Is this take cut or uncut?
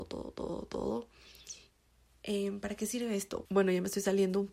cut